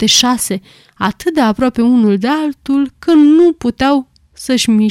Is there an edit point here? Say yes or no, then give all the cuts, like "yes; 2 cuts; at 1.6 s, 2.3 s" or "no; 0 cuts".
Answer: no; 0 cuts